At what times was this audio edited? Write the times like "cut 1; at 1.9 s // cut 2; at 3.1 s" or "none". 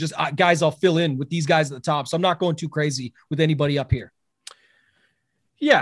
none